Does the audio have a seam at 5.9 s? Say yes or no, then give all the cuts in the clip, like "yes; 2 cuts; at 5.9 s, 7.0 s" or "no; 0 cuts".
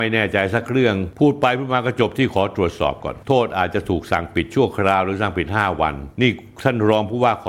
no; 0 cuts